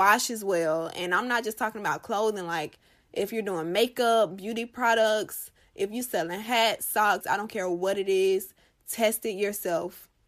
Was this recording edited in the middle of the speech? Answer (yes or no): yes